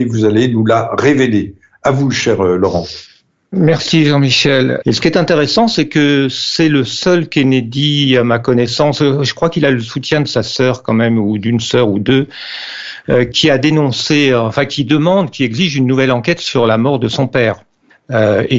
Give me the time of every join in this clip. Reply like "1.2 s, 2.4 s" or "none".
4.8 s, 13.3 s